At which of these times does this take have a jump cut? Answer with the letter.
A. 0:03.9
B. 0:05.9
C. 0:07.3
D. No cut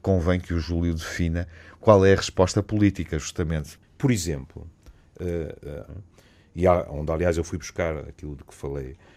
B